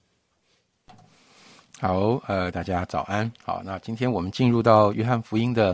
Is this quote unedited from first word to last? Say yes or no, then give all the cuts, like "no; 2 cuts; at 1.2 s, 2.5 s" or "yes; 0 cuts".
no; 1 cut; at 2.5 s